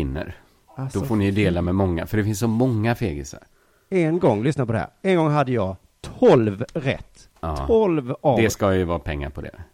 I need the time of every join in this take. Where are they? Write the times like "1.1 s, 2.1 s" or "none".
7.3 s